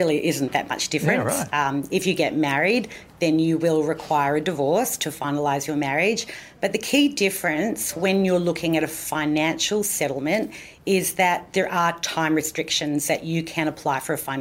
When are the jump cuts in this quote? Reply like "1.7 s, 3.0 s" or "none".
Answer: none

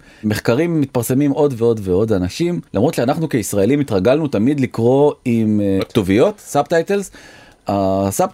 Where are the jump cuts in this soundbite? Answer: 2.7 s

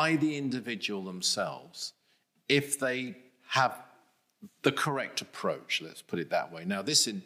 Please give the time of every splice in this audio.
none

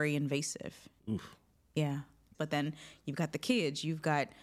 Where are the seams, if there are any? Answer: 1.0 s, 2.3 s

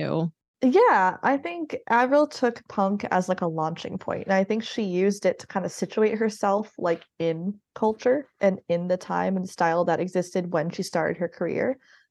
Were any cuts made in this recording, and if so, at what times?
none

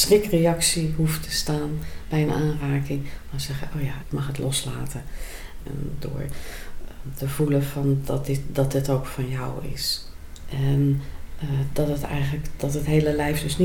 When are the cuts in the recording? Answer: 4.0 s, 5.6 s

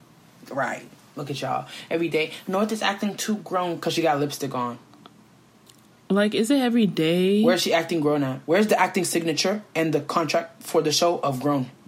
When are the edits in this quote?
none

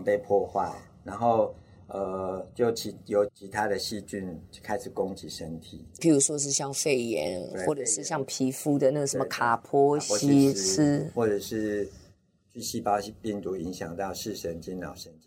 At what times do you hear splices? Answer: 3.3 s, 6.0 s

